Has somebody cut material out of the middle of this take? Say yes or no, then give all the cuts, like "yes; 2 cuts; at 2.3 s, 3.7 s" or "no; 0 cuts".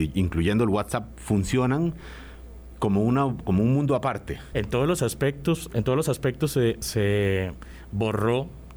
yes; 1 cut; at 4.5 s